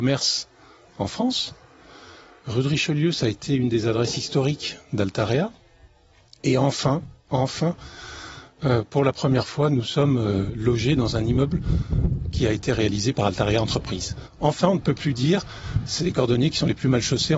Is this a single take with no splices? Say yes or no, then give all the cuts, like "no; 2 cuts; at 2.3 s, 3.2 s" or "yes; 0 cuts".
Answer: yes; 0 cuts